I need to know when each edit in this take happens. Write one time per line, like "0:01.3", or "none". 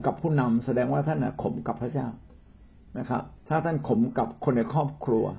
0:03.4